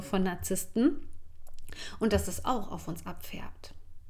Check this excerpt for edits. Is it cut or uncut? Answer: uncut